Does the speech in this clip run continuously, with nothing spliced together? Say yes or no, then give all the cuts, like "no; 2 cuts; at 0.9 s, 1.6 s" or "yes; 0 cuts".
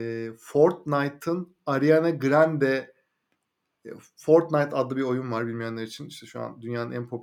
yes; 0 cuts